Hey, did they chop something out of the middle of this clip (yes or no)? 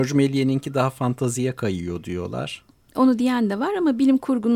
no